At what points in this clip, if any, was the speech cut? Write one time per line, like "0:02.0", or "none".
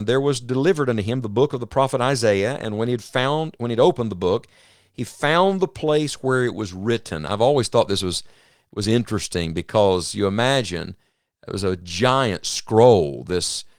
none